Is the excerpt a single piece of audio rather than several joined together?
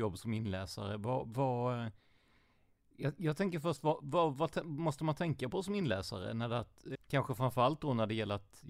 no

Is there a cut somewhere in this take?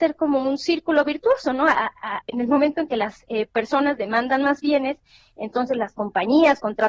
yes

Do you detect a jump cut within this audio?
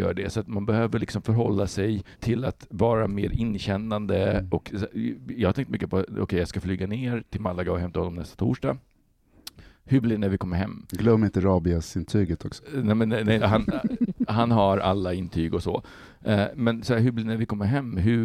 yes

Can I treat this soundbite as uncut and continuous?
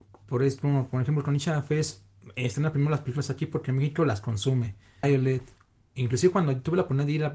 no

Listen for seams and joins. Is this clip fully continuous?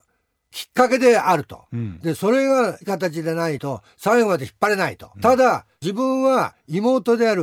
no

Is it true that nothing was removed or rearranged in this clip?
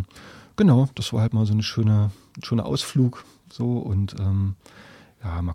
yes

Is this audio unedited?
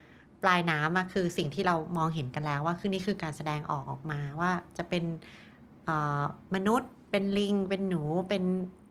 yes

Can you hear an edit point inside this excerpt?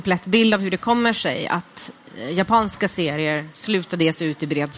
no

